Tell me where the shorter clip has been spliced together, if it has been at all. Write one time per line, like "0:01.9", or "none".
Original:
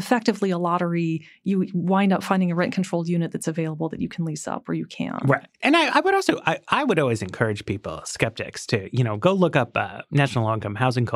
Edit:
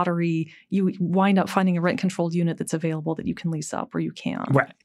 none